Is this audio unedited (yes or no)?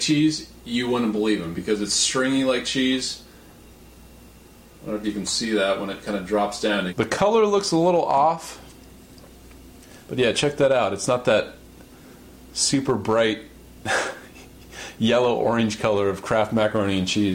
no